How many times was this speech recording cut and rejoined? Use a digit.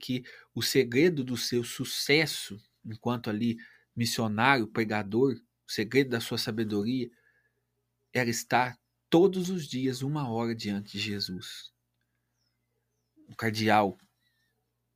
0